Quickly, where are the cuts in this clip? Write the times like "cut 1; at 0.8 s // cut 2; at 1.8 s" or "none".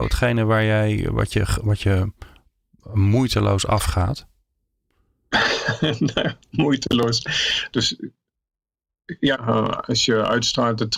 cut 1; at 7.7 s // cut 2; at 9.3 s